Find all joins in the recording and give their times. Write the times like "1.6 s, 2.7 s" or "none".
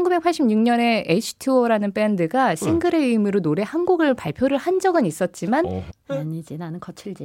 5.9 s